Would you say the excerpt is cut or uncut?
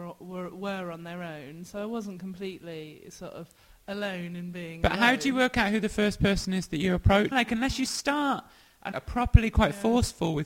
cut